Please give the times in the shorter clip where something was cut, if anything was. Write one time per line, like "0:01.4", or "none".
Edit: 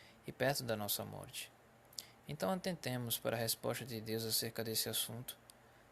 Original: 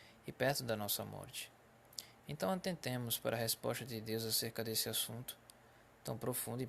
none